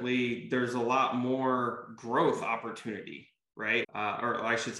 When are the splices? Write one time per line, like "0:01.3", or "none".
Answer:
0:03.8